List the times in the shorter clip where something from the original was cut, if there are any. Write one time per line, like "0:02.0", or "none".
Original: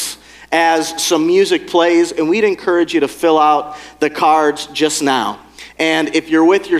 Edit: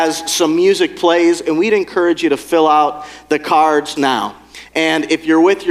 0:04.0

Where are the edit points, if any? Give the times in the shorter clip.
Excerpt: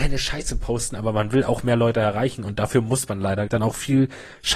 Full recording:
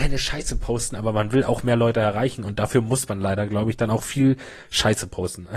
0:03.5

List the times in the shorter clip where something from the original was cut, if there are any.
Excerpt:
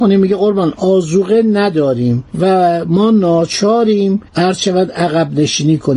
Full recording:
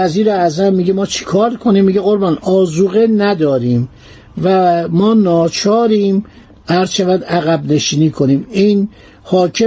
0:02.3
0:04.3

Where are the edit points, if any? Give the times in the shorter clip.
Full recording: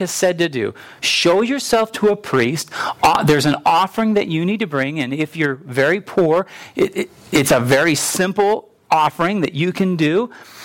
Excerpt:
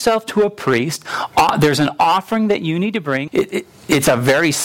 0:03.3

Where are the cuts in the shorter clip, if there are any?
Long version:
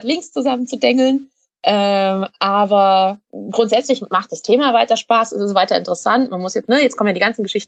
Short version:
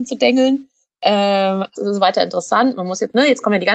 0:01.8

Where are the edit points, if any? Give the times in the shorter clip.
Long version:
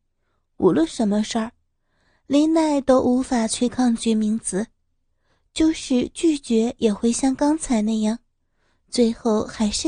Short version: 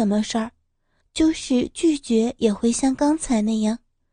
0:01.0

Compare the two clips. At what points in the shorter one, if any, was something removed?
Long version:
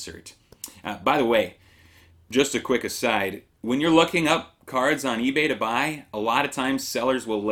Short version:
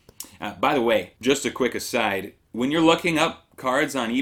0:01.2

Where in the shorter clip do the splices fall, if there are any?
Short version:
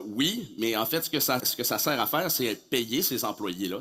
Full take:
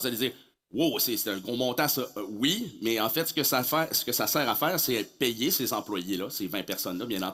0:01.4

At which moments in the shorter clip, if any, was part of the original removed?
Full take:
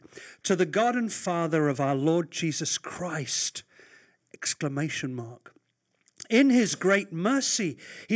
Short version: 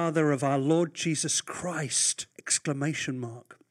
0:02.3

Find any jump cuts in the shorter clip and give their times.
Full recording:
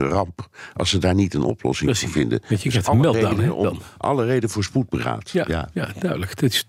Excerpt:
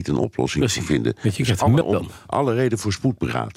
0:01.8

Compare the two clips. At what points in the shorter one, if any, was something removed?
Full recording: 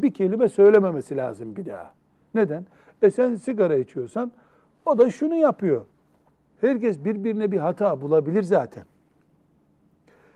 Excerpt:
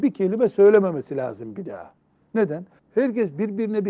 0:02.8

